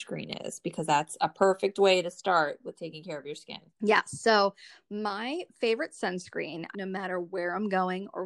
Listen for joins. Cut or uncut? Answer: cut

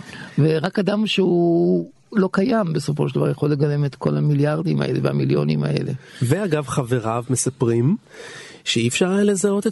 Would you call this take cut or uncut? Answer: uncut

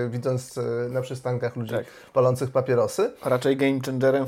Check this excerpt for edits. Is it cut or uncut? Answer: uncut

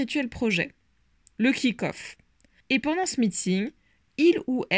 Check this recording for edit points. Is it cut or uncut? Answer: cut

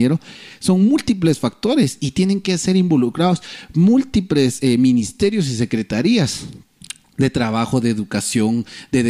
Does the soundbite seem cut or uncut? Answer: uncut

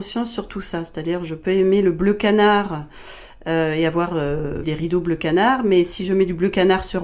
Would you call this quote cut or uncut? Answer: cut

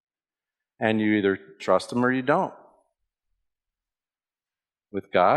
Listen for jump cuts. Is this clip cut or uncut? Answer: uncut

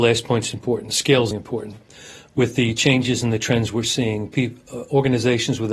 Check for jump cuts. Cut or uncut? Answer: cut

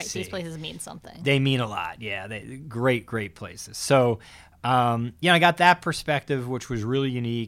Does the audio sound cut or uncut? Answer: uncut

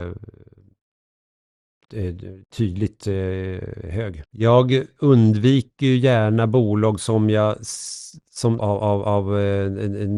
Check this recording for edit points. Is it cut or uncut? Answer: cut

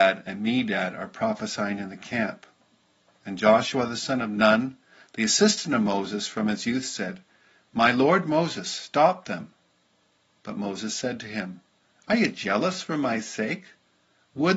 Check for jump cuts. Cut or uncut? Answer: uncut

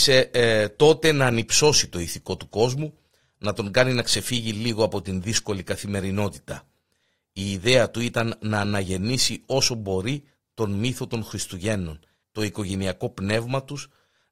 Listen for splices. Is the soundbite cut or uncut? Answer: cut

